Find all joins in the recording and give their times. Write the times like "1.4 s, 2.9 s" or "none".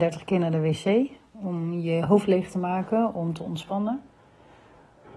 none